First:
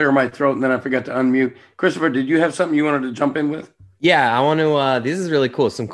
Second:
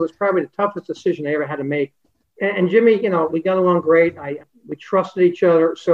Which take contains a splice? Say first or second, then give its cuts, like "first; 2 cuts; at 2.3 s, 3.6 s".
second; 2 cuts; at 3.3 s, 4.4 s